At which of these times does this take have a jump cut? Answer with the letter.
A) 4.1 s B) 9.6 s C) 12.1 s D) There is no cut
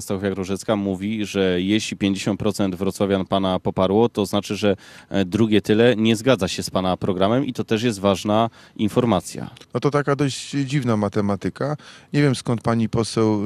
B